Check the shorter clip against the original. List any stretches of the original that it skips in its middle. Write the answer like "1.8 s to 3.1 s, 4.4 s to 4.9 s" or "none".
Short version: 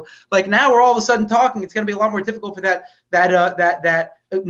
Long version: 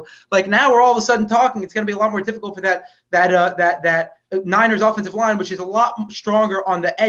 none